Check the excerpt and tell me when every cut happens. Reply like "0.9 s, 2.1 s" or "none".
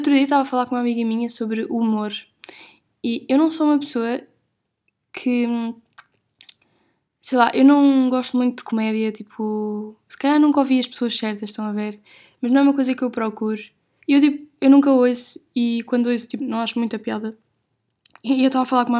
14.0 s, 16.4 s